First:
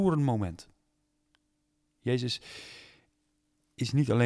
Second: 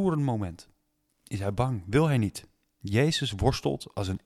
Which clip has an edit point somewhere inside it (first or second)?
second